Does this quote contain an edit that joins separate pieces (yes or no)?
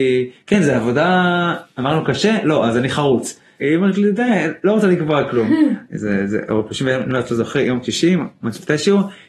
yes